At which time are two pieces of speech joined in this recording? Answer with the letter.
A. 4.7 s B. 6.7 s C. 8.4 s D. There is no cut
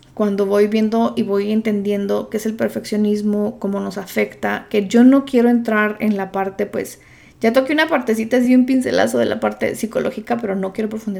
D